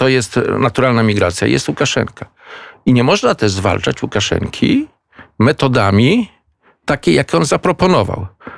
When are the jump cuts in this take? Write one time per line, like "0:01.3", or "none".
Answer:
none